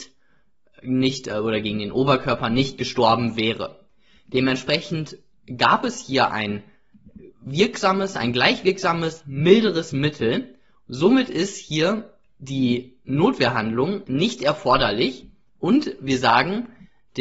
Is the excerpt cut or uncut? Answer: uncut